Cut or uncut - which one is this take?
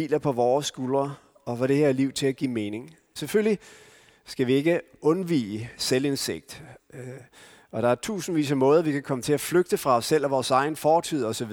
cut